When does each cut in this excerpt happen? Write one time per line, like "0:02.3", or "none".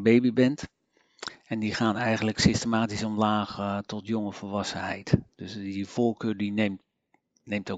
none